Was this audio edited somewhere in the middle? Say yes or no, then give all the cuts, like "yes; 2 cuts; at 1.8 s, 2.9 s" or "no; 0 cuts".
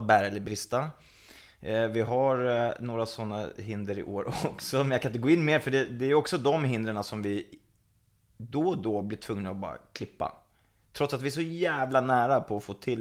no; 0 cuts